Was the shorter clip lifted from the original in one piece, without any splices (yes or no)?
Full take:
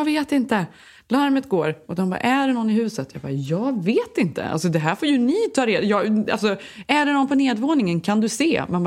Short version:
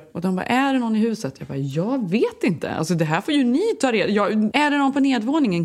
no